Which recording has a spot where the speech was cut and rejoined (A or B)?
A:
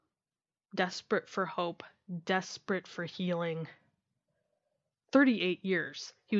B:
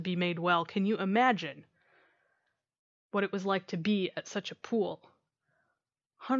A